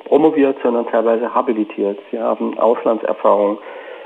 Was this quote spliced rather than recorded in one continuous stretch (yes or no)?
no